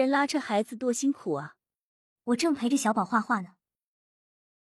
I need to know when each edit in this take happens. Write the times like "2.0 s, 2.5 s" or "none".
2.1 s

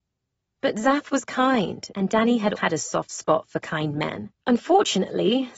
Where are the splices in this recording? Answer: 2.6 s, 4.4 s

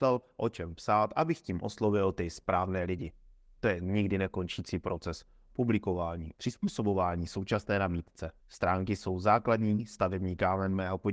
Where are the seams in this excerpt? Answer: 6.3 s, 8.4 s

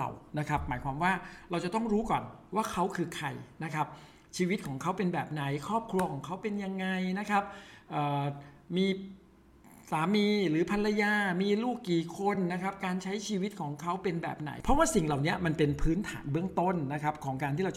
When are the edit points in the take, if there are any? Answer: none

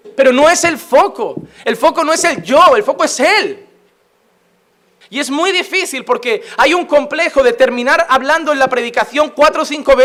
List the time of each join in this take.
5.0 s

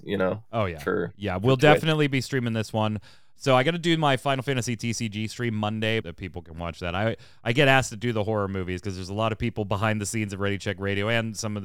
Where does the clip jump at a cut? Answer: 6.0 s

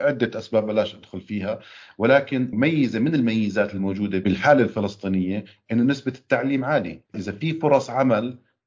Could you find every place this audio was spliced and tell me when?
7.1 s

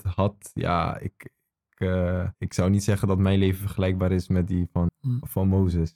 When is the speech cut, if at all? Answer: 2.3 s, 4.9 s

